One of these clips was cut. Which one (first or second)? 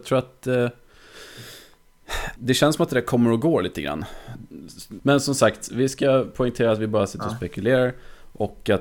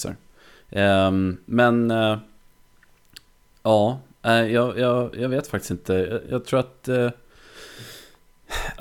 first